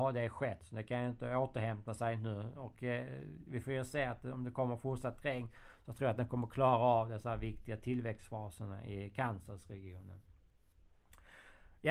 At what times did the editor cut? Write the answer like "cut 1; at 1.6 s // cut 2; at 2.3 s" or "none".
none